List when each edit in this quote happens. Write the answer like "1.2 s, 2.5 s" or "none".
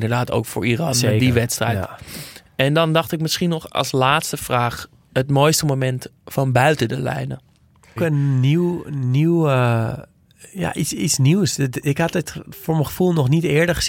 8.0 s